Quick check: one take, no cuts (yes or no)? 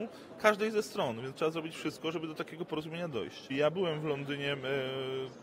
no